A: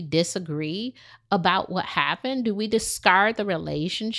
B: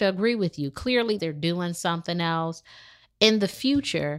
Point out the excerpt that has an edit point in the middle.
B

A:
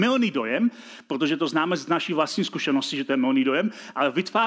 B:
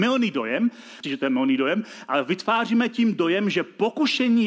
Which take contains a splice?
B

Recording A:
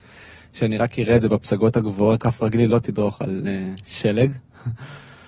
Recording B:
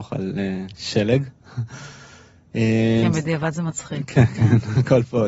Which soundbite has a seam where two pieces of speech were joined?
A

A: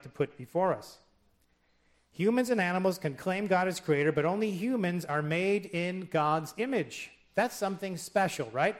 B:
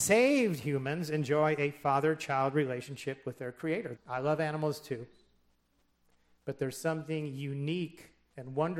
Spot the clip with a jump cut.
B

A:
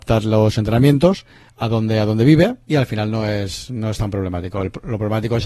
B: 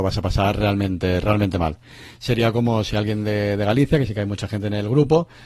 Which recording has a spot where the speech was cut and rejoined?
A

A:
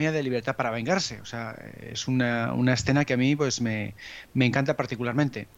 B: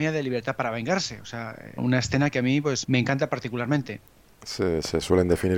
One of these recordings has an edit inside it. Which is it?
B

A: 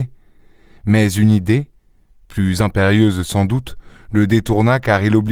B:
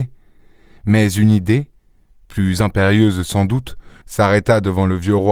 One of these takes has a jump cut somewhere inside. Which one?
B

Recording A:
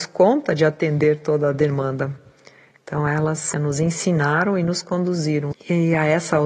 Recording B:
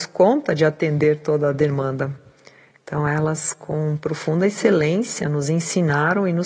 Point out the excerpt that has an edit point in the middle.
A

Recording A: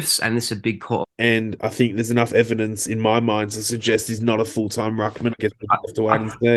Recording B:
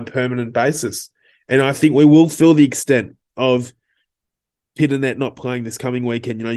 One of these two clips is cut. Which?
A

